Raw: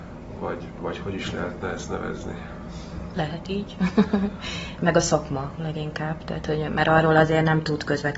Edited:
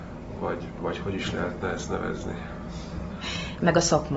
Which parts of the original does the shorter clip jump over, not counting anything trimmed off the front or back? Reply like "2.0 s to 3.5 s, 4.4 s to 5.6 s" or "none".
3.1 s to 4.3 s